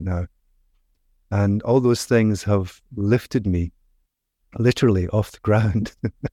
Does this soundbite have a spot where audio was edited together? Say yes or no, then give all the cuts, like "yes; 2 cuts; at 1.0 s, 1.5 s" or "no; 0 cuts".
no; 0 cuts